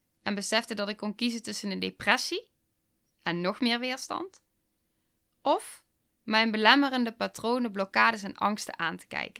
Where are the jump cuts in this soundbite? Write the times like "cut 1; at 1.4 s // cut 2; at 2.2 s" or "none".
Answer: none